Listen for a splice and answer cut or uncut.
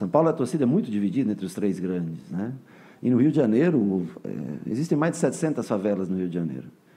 uncut